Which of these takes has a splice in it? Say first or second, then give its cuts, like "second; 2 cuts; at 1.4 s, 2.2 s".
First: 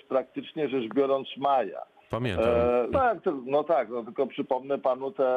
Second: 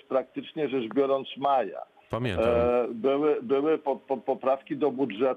first; 1 cut; at 2.9 s